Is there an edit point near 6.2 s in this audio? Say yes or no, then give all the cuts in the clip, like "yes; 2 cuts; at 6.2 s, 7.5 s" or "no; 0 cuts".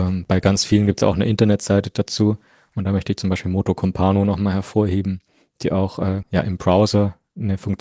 yes; 1 cut; at 6.2 s